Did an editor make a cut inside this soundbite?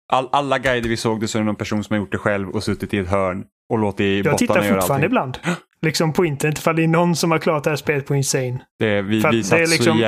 no; 0 cuts

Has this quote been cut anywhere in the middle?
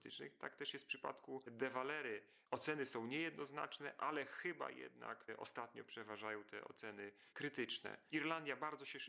no; 0 cuts

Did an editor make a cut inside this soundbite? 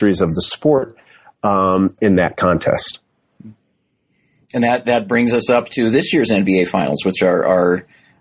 yes; 1 cut; at 2.0 s

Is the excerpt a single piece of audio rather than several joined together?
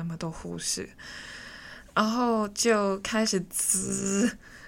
yes; 0 cuts

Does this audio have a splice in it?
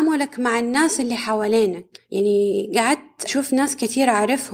yes; 1 cut; at 1.9 s

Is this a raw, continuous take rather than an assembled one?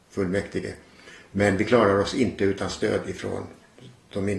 yes; 0 cuts

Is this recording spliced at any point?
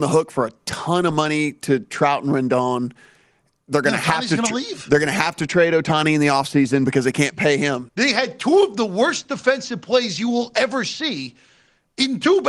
yes; 1 cut; at 7.9 s

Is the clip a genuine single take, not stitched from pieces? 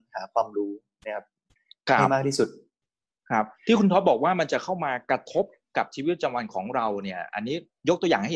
yes; 0 cuts

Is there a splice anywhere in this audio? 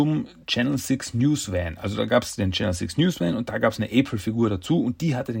no; 0 cuts

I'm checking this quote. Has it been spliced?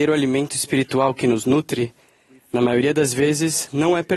no; 0 cuts

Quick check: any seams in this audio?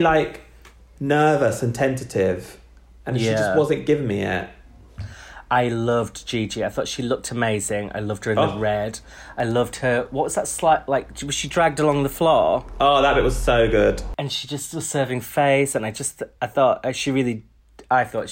no; 0 cuts

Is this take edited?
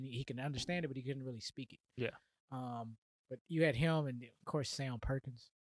no; 0 cuts

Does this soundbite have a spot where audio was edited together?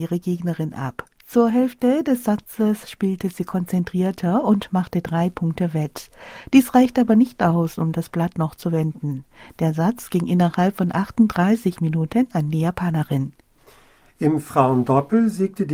no; 0 cuts

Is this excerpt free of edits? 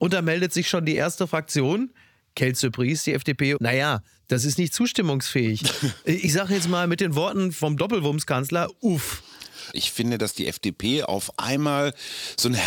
no; 3 cuts; at 3.6 s, 6.0 s, 9.7 s

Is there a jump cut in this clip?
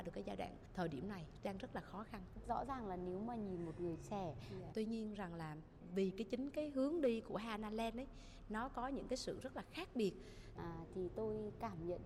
yes; 2 cuts; at 4.7 s, 10.6 s

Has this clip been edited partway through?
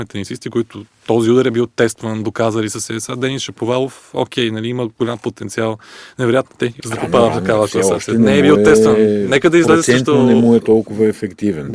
yes; 1 cut; at 6.8 s

